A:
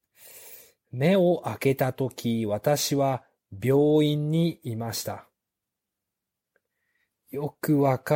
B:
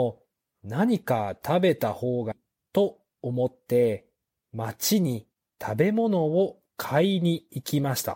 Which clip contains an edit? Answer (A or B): B